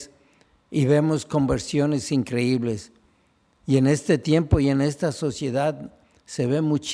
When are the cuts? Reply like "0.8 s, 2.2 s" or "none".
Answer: none